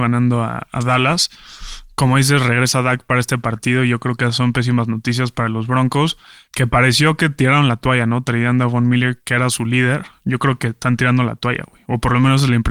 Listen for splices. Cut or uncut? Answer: uncut